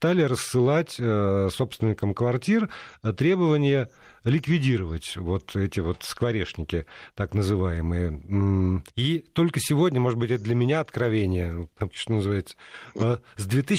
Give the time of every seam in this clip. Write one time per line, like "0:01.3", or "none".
0:08.9
0:11.9